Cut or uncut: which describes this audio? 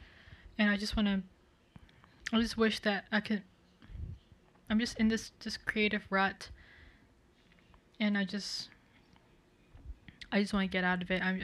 cut